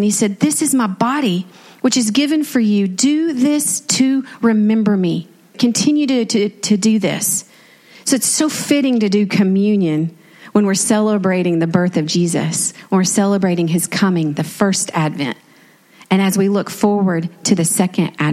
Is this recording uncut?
no; 1 cut; at 5.5 s

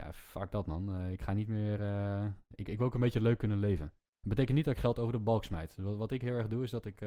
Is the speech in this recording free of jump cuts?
yes; 0 cuts

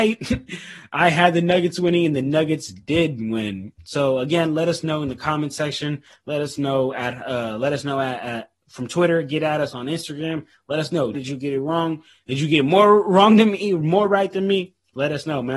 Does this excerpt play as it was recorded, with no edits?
no; 1 cut; at 11.1 s

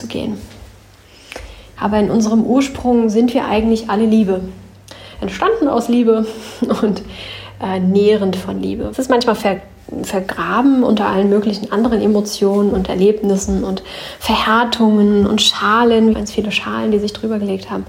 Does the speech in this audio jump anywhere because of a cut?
yes; 3 cuts; at 1.8 s, 8.9 s, 16.1 s

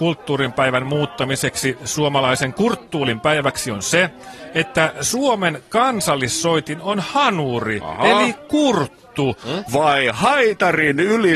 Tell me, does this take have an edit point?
yes; 1 cut; at 9.7 s

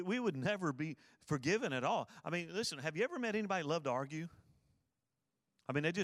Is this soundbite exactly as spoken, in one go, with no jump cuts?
yes; 0 cuts

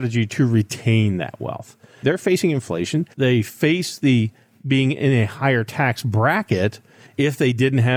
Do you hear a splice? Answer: yes; 2 cuts; at 2.0 s, 3.1 s

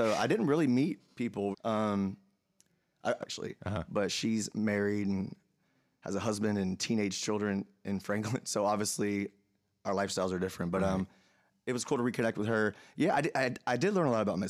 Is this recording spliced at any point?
yes; 2 cuts; at 1.5 s, 3.2 s

